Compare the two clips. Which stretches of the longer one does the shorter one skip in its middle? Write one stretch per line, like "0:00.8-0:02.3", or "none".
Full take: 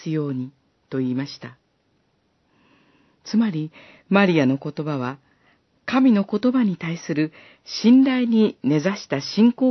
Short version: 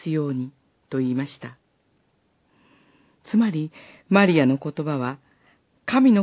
none